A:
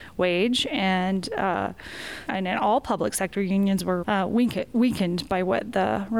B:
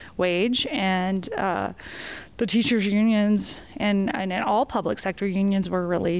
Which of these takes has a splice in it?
A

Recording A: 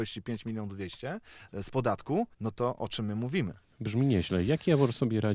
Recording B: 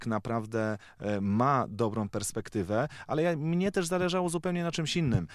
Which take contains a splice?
A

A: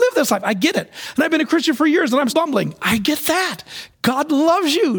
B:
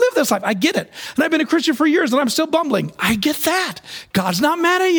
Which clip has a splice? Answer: A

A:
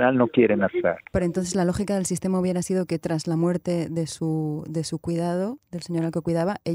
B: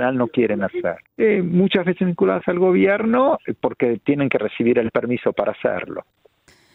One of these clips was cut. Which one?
B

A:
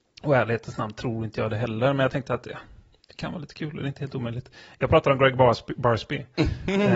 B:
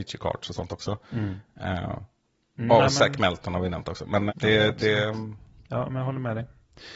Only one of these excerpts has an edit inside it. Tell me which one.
B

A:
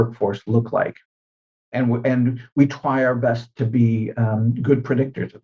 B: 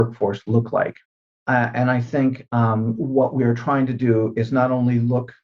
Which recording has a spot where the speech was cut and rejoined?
B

